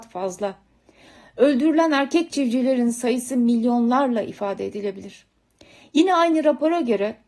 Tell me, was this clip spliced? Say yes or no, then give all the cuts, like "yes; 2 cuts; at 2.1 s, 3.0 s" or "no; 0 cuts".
no; 0 cuts